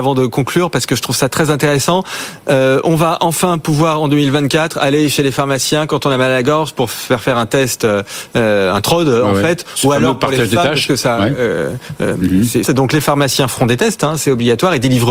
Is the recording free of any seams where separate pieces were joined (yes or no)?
no